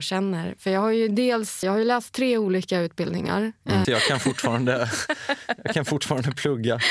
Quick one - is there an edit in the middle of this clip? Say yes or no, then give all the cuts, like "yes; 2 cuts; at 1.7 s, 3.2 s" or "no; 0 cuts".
yes; 2 cuts; at 1.6 s, 3.8 s